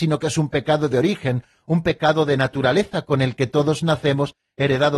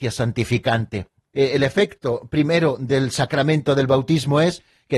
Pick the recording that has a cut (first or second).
second